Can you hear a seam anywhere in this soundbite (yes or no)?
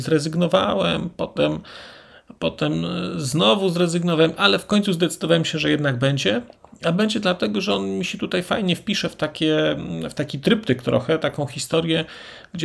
no